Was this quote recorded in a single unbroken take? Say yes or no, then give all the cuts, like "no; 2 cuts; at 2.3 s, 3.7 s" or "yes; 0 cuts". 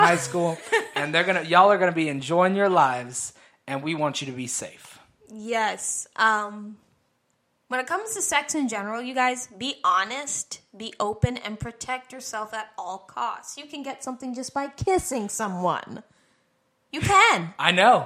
yes; 0 cuts